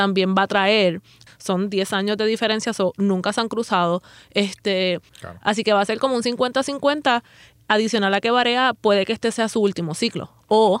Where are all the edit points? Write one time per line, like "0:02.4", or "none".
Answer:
0:01.3
0:05.1

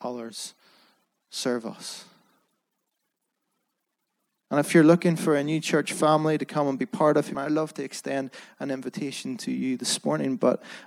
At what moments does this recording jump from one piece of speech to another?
0:07.3

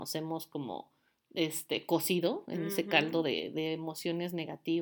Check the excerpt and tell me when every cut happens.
none

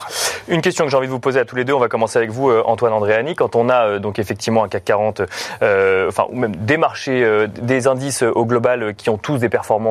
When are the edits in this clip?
0:09.0

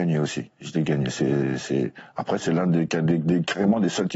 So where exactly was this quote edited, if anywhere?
none

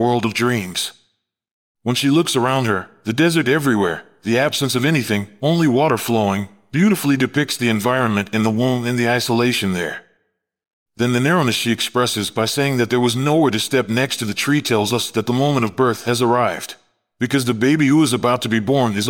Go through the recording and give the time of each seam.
none

